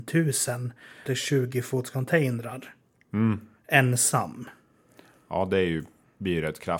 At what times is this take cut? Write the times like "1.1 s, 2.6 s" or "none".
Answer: none